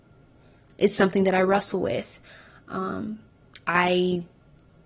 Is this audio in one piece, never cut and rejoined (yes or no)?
yes